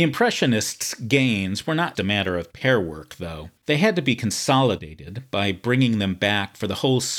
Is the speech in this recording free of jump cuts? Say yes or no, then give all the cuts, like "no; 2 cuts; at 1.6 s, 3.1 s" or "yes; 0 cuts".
no; 2 cuts; at 2.0 s, 3.6 s